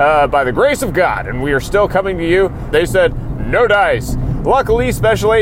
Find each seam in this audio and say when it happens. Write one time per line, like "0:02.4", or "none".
0:02.7